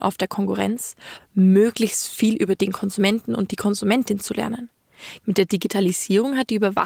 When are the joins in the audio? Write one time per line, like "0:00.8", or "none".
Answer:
0:01.2
0:05.2